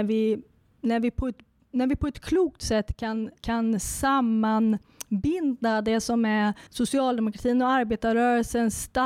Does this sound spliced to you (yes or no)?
yes